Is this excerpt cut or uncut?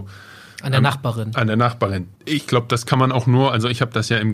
cut